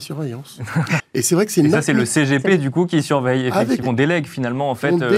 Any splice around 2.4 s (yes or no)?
no